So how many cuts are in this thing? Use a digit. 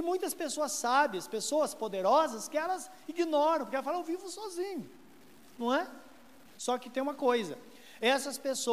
1